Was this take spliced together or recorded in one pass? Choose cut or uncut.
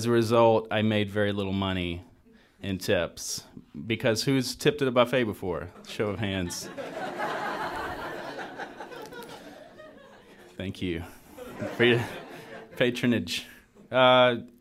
uncut